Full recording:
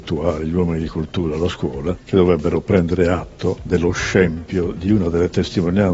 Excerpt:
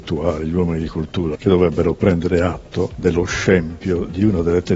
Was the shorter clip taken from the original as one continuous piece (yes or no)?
no